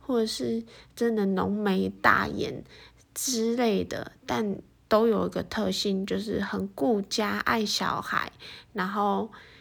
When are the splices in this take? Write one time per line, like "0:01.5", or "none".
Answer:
none